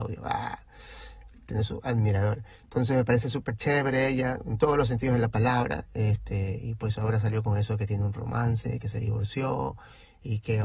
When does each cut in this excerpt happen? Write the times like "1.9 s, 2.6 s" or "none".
none

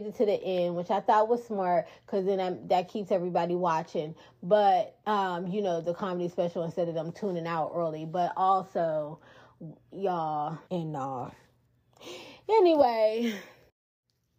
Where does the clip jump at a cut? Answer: 5.0 s, 10.6 s

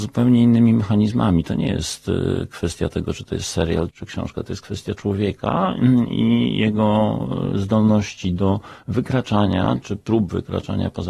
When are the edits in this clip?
3.9 s

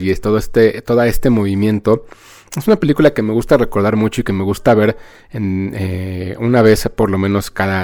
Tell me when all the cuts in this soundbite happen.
none

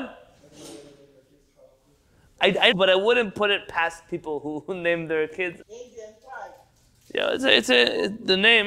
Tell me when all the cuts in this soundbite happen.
2.7 s, 5.6 s

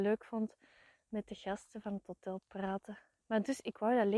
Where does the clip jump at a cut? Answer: 3.2 s

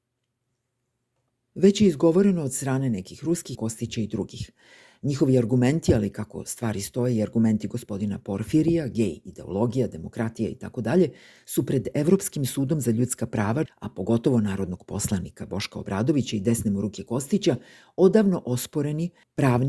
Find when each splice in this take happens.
3.5 s, 13.7 s

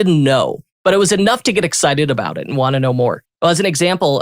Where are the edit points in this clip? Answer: 3.3 s

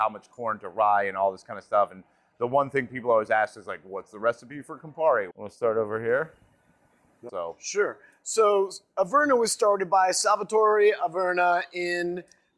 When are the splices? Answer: 5.3 s, 7.3 s

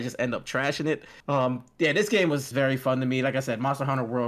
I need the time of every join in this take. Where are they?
1.2 s, 2.5 s

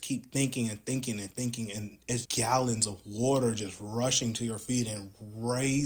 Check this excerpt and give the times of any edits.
2.3 s

